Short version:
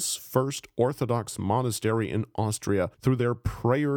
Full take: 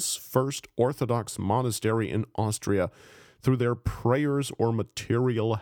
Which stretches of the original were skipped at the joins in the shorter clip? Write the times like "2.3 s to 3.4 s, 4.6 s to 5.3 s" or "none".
2.9 s to 3.3 s

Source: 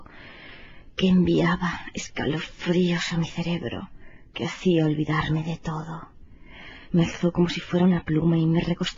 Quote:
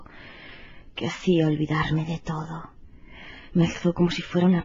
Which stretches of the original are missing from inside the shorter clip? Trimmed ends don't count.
0.9 s to 4.3 s

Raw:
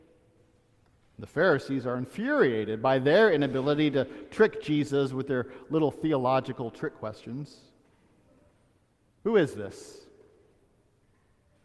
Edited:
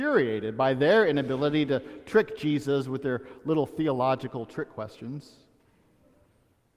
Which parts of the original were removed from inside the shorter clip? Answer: none

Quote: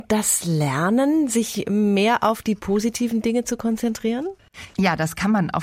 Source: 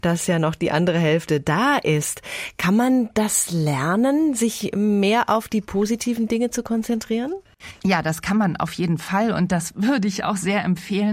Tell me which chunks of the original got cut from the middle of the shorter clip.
none

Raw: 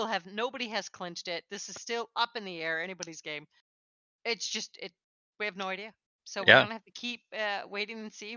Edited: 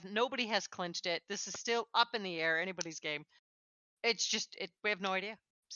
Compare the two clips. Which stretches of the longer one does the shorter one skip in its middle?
5.0 s to 5.3 s

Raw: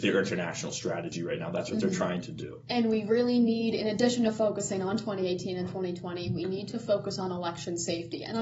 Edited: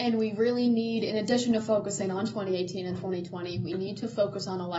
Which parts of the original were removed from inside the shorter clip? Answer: none

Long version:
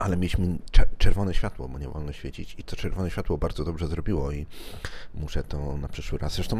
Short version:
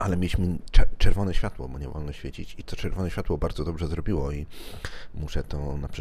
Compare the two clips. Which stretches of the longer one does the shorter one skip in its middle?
none

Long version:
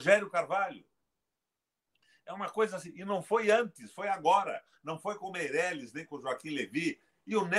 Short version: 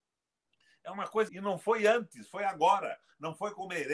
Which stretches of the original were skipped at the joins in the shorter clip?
2.7 s to 2.9 s

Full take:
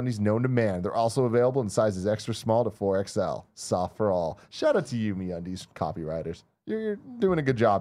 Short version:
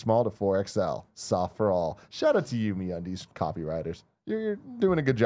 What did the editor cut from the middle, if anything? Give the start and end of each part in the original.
none

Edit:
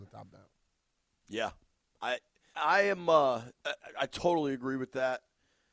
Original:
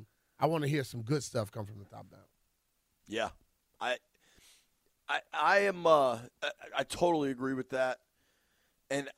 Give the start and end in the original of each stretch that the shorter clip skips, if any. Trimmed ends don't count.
4.3 s to 5.3 s

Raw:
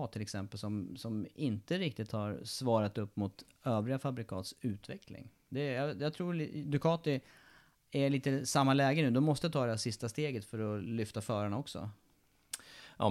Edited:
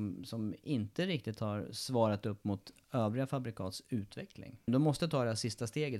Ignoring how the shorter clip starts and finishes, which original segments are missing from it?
5.4 s to 9.1 s

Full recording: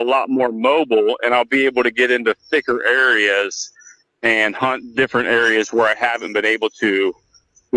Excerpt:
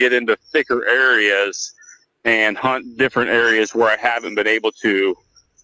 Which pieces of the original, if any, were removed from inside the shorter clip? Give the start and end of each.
none

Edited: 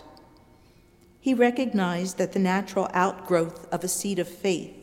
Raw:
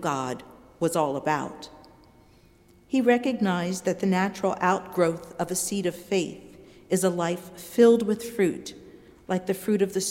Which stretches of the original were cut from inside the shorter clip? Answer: none

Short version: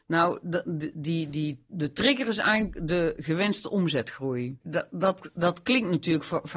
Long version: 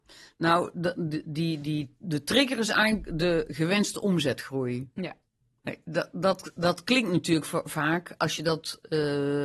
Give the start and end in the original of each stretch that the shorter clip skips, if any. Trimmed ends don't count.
4.9 s to 5.8 s

